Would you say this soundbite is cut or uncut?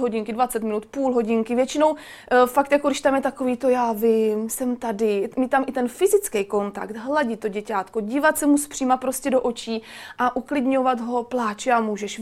uncut